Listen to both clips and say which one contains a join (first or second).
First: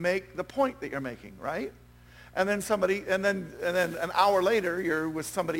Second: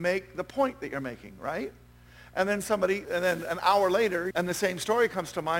second